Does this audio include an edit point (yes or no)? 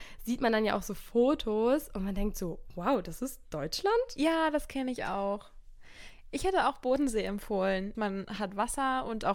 yes